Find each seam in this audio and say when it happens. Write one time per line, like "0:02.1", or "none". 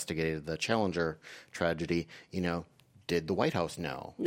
none